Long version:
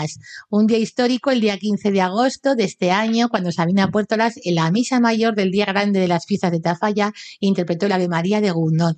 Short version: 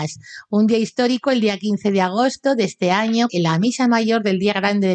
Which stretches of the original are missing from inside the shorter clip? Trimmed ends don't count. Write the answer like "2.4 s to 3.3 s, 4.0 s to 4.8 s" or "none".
3.3 s to 4.4 s